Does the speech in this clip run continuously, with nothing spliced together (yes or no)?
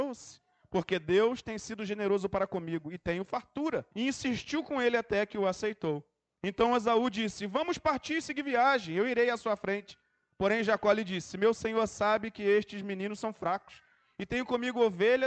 no